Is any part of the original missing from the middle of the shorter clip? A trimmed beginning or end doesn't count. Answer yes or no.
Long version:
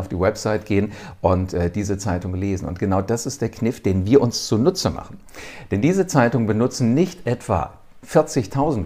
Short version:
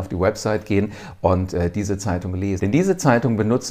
yes